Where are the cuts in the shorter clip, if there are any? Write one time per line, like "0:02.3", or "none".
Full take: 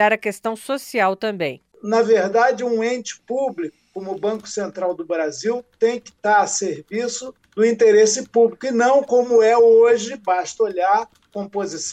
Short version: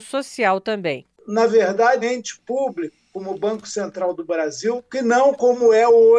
0:02.0
0:04.9